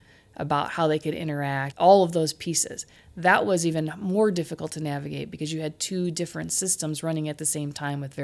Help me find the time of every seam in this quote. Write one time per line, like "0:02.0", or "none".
0:01.7